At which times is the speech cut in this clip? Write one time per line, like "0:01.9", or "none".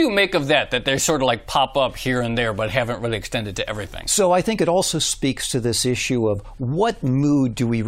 none

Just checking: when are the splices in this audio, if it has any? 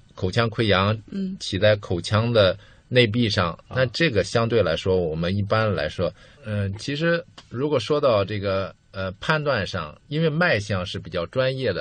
0:06.4
0:10.0

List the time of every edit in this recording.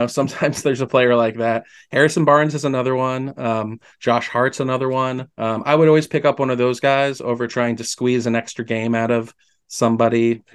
0:05.3

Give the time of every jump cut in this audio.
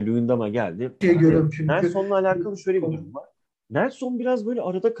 0:01.0
0:03.6

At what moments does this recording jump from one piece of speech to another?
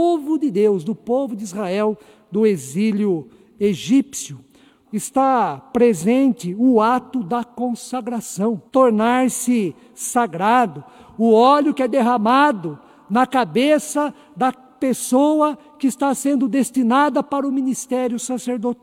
0:04.8
0:08.7

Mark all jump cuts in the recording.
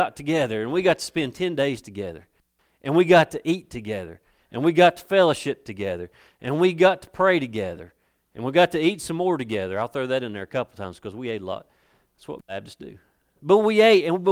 none

